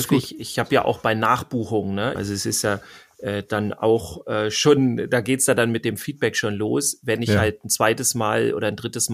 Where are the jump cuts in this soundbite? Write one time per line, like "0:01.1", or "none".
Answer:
0:02.1